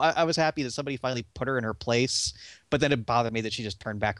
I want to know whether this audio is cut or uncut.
cut